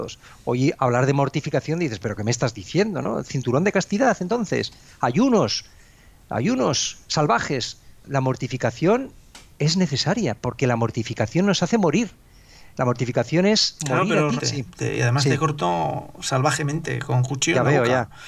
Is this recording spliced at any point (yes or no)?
yes